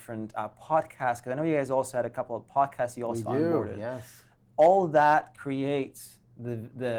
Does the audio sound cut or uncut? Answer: uncut